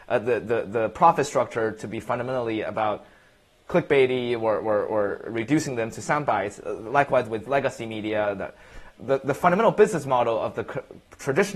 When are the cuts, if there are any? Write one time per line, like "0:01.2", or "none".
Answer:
0:09.0